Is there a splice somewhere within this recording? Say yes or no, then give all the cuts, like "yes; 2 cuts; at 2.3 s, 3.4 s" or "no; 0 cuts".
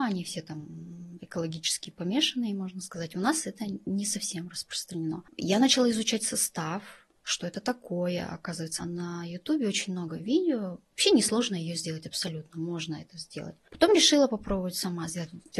yes; 1 cut; at 8.8 s